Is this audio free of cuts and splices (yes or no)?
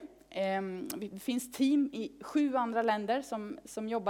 yes